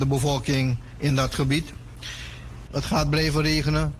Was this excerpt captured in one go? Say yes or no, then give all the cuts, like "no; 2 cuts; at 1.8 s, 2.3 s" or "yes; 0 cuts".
no; 1 cut; at 2.7 s